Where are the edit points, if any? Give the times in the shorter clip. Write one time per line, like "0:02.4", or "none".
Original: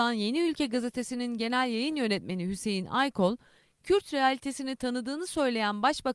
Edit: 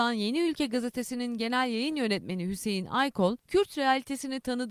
0:03.4